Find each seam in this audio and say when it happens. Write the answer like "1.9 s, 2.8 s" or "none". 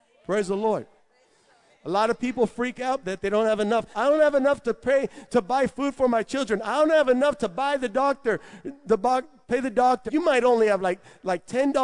3.9 s, 10.1 s